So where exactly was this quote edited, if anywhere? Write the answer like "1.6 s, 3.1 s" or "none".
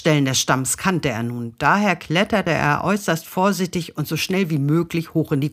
none